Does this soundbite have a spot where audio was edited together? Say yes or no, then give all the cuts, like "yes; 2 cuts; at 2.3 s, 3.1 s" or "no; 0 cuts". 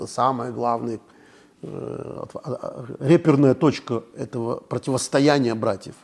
no; 0 cuts